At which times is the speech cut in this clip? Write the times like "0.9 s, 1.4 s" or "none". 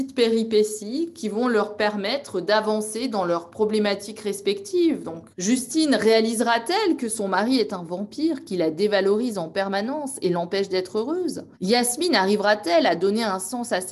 5.3 s, 11.5 s